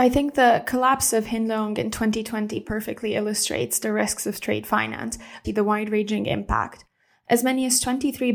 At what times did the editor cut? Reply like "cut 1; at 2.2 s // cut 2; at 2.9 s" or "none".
cut 1; at 5.4 s